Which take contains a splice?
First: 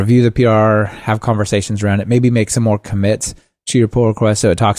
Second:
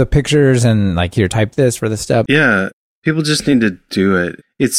second; 1 cut; at 2.3 s

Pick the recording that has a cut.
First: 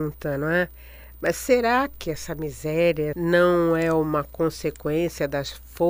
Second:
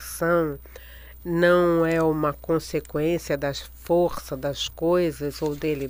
first; 1 cut; at 3.1 s

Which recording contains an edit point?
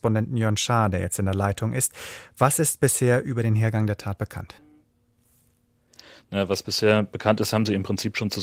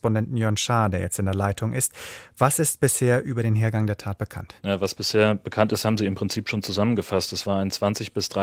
second; 1 cut; at 4.6 s

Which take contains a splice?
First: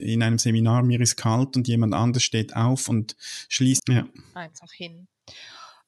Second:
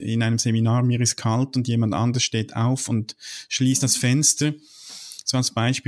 first; 1 cut; at 3.8 s

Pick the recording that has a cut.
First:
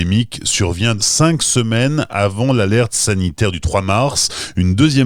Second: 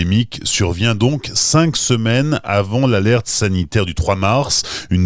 first; 1 cut; at 1.0 s

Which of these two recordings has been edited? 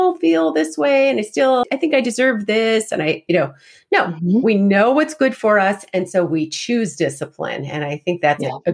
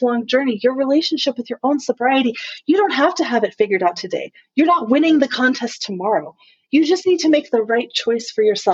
first; 1 cut; at 1.6 s

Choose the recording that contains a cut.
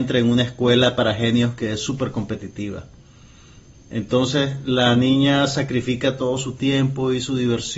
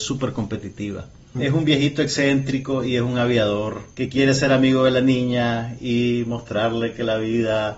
second; 2 cuts; at 1.4 s, 3.9 s

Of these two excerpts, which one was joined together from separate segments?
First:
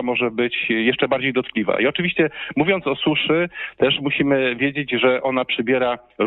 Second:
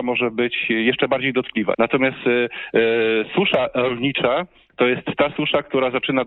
second; 1 cut; at 1.7 s

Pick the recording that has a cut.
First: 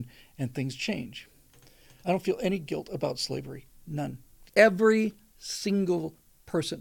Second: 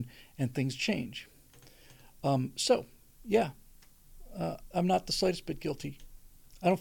first; 2 cuts; at 2.0 s, 4.5 s

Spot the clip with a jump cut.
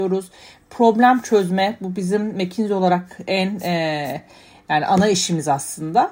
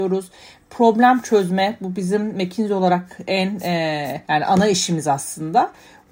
second; 1 cut; at 4.2 s

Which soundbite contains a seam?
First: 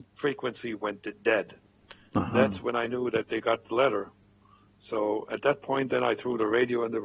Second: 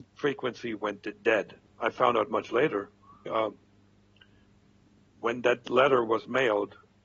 second; 2 cuts; at 1.7 s, 3.3 s

